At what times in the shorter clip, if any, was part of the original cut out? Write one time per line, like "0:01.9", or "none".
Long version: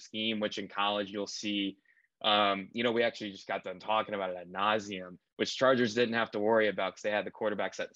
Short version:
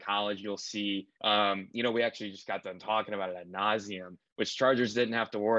0:01.1